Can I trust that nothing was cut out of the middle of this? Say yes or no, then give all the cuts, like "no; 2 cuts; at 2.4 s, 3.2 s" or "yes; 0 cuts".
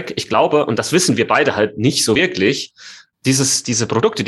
yes; 0 cuts